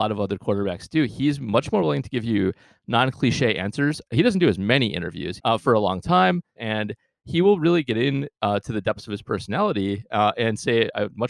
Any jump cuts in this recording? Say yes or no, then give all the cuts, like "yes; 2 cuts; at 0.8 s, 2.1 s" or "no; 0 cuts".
yes; 2 cuts; at 5.4 s, 6.6 s